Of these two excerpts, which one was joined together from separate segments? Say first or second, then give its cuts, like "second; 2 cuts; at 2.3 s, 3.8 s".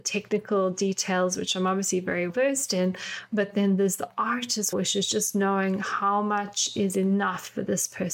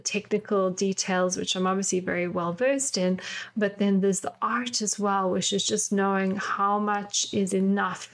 first; 2 cuts; at 2.3 s, 4.7 s